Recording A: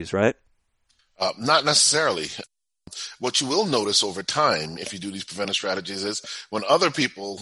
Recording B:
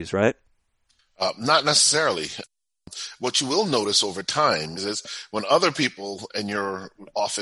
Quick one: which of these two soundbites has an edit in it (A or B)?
B